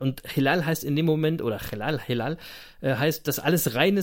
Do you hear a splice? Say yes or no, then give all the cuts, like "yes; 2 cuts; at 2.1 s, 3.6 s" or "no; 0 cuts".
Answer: no; 0 cuts